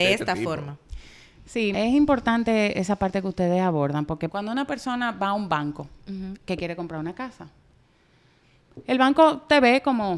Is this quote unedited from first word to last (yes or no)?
no